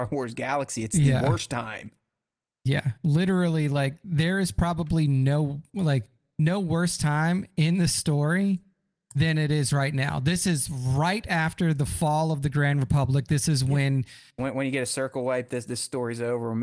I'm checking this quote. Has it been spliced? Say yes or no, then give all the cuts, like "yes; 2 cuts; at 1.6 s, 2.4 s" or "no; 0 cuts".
yes; 1 cut; at 14.4 s